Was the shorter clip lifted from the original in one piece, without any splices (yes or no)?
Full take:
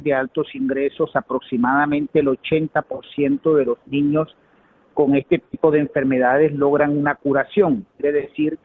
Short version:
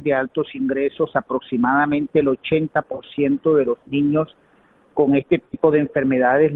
yes